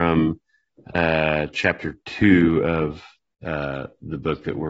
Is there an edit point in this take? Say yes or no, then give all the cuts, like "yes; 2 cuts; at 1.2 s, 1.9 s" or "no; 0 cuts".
no; 0 cuts